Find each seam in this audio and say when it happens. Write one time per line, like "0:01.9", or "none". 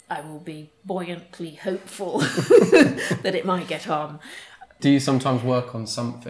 0:04.8